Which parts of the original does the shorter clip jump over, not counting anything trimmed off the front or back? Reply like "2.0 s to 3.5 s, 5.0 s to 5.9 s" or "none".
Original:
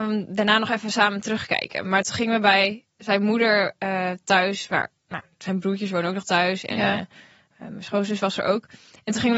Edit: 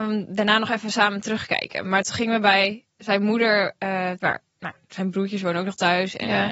4.2 s to 4.7 s